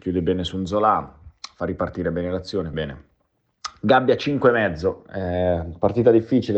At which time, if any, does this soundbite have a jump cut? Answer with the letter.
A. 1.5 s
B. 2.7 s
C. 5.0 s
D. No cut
B